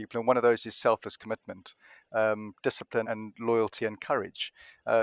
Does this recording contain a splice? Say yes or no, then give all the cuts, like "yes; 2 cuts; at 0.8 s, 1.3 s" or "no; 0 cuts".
yes; 1 cut; at 3.0 s